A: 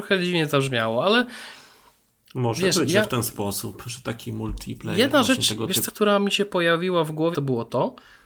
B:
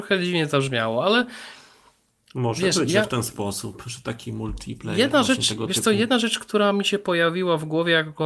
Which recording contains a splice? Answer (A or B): A